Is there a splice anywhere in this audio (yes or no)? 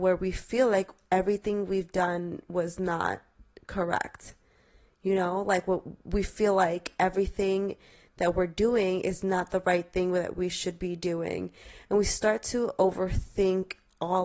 no